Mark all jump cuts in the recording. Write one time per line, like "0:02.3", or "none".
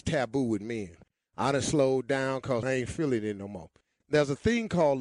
0:02.6